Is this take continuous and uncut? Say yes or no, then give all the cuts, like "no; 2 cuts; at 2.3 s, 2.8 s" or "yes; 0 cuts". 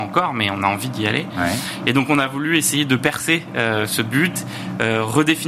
yes; 0 cuts